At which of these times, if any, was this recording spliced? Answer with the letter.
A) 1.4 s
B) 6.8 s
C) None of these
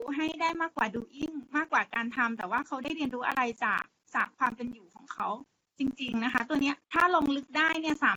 B